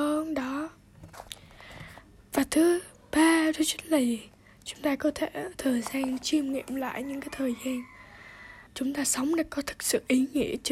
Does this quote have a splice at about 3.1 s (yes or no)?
no